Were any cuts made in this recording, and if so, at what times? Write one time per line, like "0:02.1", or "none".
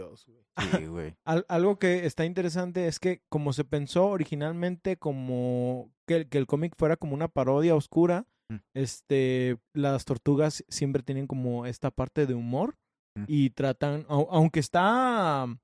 0:09.7